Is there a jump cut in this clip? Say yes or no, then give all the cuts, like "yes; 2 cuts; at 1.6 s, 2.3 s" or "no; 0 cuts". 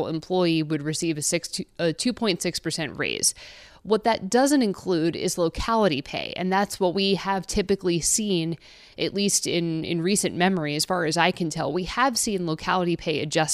no; 0 cuts